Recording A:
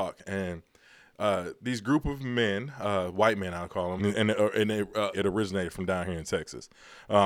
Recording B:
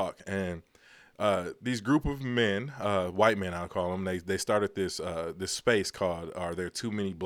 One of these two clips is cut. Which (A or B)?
A